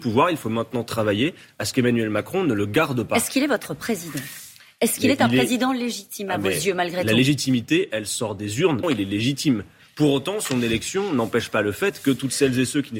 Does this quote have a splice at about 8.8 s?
yes; 1 cut; at 8.8 s

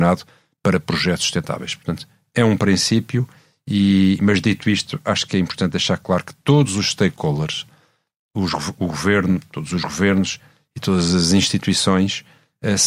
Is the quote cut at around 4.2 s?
no; 0 cuts

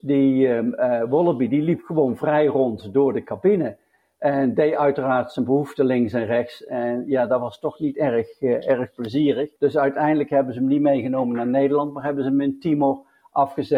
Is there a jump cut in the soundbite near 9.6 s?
yes; 1 cut; at 9.6 s

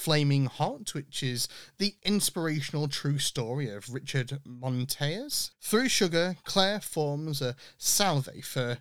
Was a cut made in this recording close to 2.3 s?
no; 1 cut; at 5.5 s

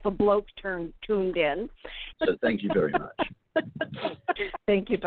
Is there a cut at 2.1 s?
yes; 1 cut; at 2.1 s

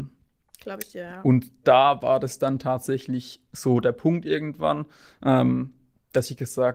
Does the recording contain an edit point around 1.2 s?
no; 0 cuts

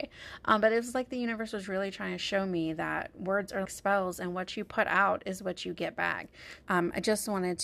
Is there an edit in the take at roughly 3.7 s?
yes; 2 cuts; at 3.7 s, 6.6 s

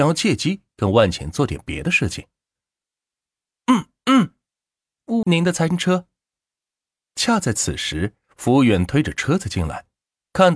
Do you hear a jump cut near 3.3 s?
no; 1 cut; at 5.2 s

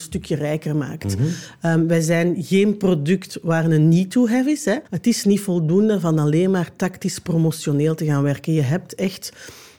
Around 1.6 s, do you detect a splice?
no; 1 cut; at 4.9 s

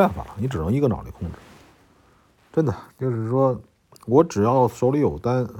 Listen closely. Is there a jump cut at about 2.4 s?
yes; 1 cut; at 2.4 s

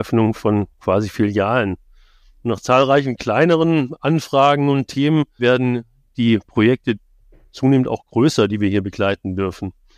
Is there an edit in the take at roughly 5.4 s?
yes; 1 cut; at 5.4 s

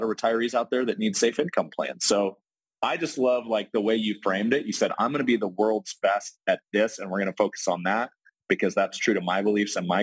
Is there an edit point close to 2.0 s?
no; 0 cuts

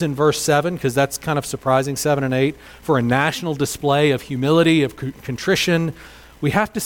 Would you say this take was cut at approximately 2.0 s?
no; 0 cuts

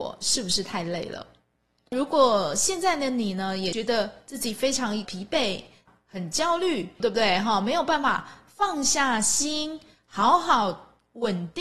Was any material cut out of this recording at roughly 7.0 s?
yes; 1 cut; at 7.0 s

